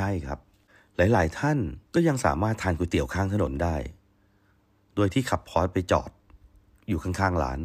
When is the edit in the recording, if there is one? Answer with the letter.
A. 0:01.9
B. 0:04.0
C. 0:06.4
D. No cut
A